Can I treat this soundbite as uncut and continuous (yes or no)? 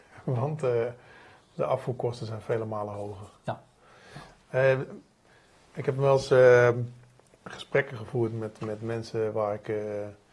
yes